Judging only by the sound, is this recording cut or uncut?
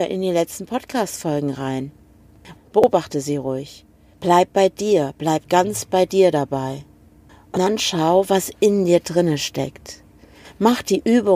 cut